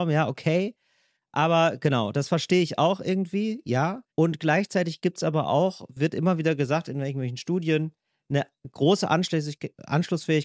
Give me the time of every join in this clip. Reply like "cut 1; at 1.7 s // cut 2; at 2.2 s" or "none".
cut 1; at 4.1 s